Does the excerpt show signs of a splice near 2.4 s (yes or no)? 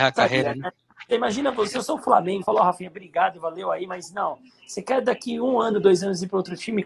yes